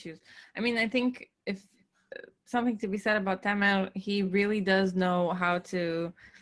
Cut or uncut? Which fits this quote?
uncut